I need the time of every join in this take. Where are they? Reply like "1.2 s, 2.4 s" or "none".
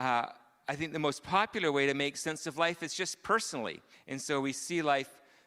3.9 s